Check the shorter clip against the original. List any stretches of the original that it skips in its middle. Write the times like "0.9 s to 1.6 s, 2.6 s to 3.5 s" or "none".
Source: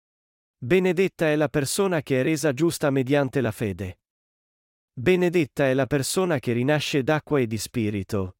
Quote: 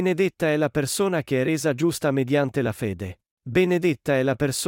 4.1 s to 4.8 s